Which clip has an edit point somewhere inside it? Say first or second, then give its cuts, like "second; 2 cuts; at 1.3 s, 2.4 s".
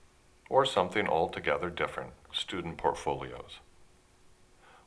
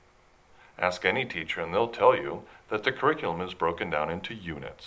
first; 1 cut; at 2.3 s